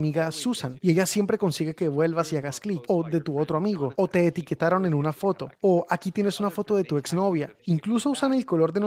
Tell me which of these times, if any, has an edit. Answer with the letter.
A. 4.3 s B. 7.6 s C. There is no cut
B